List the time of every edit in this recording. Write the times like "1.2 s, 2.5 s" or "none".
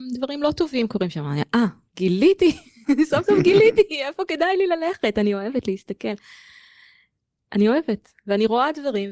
none